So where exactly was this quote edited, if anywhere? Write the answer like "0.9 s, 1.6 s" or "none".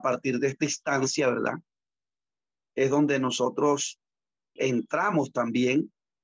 4.6 s

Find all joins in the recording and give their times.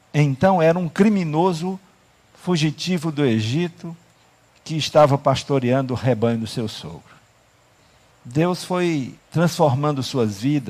8.1 s, 9.2 s

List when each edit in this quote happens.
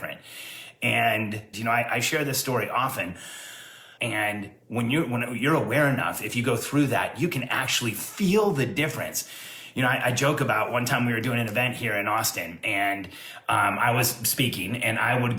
1.5 s, 4.0 s

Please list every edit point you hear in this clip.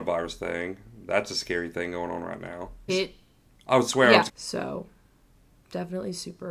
2.9 s, 4.3 s

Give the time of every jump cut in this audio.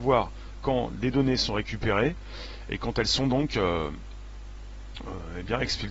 none

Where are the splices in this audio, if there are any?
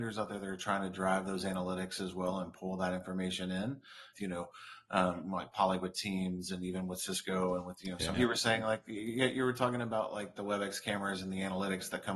4.1 s, 8.1 s

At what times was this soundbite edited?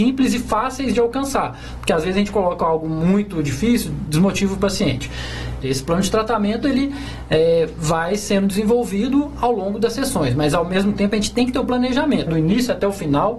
5.6 s, 12.3 s

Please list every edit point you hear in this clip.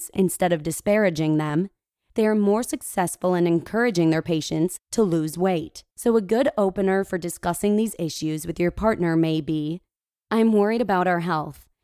5.9 s

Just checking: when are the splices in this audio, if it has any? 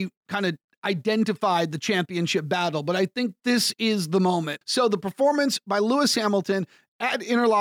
4.6 s

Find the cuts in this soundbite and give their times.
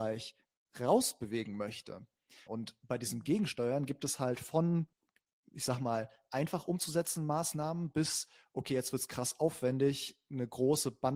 2.5 s

